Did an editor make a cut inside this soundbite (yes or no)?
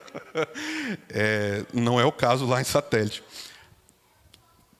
no